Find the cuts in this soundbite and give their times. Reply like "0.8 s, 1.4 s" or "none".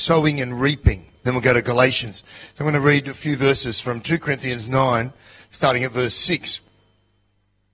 1.2 s